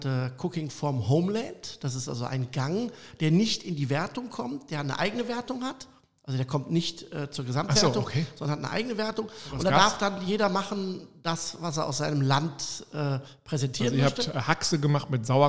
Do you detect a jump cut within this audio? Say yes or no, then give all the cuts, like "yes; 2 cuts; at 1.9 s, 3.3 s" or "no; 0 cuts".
no; 0 cuts